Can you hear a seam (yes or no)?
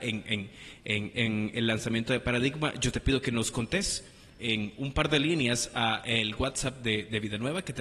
no